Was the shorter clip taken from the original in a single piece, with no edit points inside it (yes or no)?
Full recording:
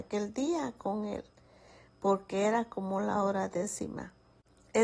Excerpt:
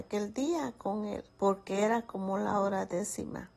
no